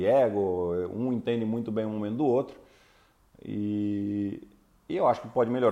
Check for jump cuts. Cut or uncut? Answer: uncut